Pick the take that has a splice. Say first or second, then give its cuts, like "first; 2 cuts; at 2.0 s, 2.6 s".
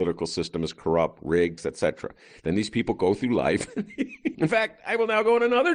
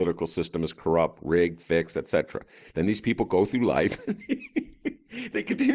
first; 2 cuts; at 1.6 s, 4.3 s